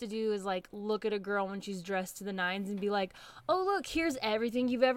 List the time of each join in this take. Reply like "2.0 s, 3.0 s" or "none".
none